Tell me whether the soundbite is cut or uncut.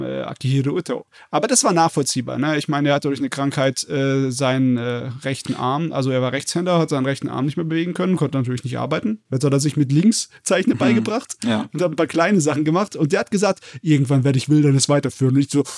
uncut